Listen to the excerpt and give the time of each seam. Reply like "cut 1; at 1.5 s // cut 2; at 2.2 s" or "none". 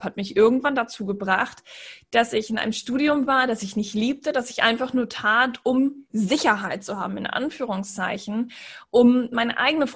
none